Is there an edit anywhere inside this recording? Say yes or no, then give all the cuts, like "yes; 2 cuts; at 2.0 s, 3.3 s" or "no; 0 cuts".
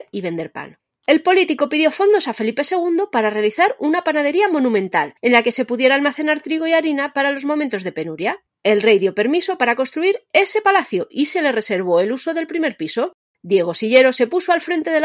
no; 0 cuts